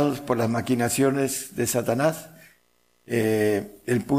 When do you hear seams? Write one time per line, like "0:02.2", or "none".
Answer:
none